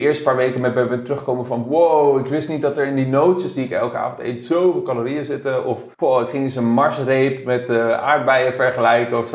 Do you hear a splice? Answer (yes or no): yes